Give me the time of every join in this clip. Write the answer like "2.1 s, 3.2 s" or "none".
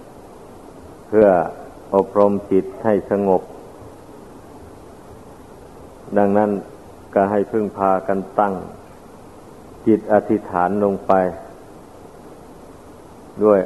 none